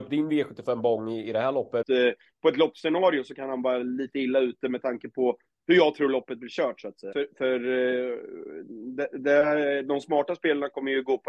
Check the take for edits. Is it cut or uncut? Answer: cut